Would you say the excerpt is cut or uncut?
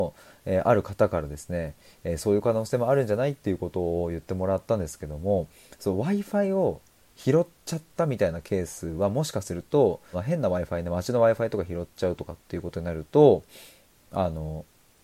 cut